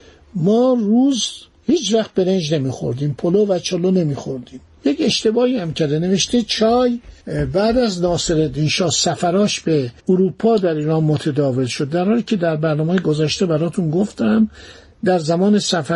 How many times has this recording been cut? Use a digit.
2